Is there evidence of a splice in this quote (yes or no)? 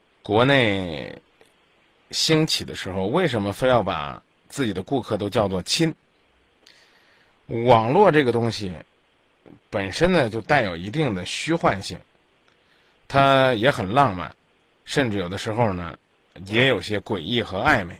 yes